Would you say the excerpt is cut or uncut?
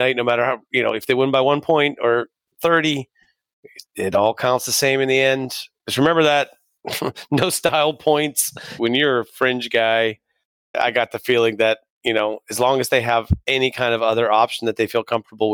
cut